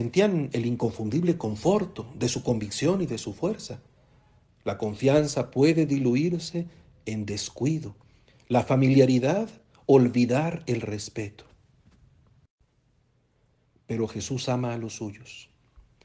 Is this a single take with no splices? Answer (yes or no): yes